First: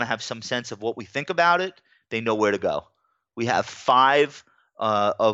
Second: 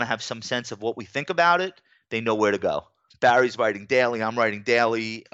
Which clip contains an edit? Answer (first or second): second